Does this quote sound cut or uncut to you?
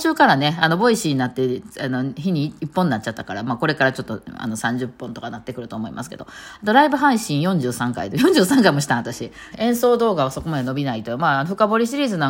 cut